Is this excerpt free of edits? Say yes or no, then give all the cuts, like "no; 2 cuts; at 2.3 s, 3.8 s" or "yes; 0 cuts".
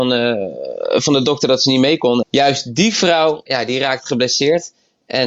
no; 2 cuts; at 2.2 s, 3.5 s